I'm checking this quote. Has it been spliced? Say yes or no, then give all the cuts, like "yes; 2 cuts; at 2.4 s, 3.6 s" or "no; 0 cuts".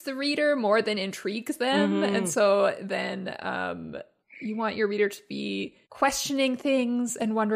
yes; 2 cuts; at 4.2 s, 5.8 s